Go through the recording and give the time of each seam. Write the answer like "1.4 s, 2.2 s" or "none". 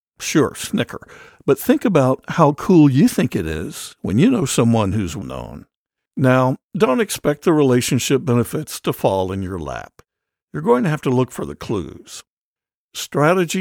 5.2 s